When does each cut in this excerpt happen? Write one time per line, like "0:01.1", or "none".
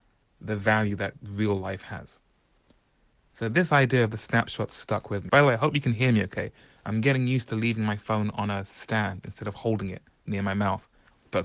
0:05.3